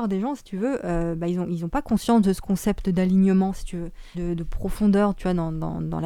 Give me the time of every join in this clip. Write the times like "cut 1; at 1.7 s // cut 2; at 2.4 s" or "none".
cut 1; at 4.1 s